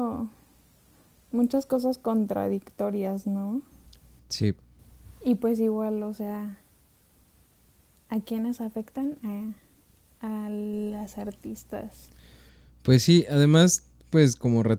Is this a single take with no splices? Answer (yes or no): yes